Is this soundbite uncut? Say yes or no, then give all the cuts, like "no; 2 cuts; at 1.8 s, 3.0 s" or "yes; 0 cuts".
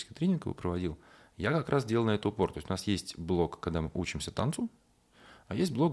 yes; 0 cuts